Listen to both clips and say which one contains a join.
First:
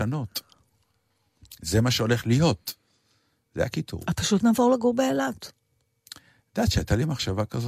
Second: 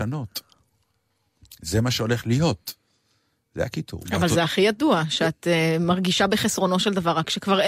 second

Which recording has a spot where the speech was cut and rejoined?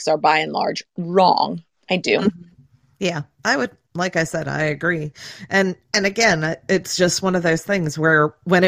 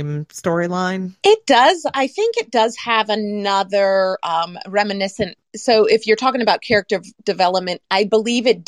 second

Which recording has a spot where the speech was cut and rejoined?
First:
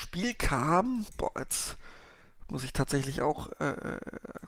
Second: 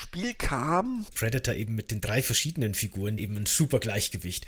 second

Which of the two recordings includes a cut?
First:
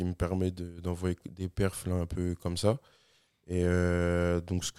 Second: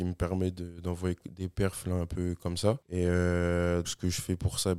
second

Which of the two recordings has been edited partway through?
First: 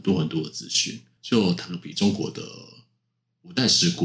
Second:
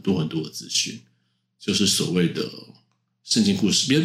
first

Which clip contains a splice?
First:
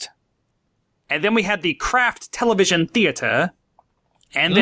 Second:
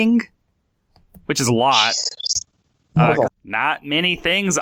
second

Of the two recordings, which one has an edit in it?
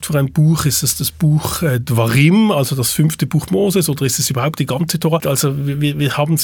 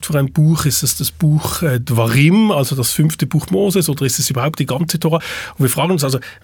first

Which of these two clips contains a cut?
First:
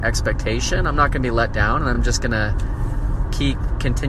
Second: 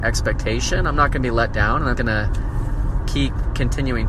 second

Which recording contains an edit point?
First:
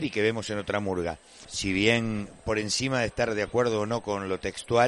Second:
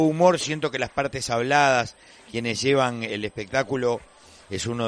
first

